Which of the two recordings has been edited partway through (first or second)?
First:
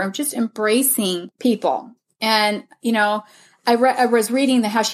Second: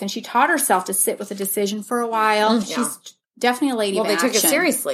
second